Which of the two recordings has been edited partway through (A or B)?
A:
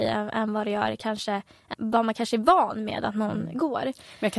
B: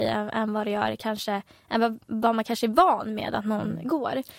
A